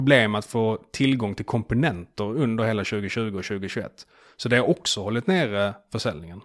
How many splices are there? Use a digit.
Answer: 0